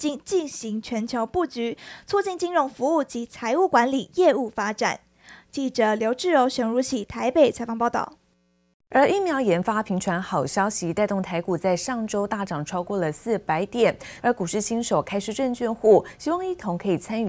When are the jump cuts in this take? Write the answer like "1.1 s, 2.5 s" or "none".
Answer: 14.2 s